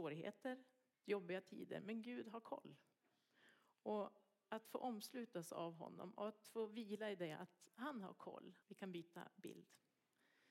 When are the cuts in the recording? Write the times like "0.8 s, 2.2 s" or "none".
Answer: 0.9 s, 8.6 s